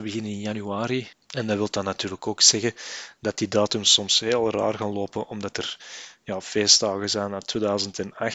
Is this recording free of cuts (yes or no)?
no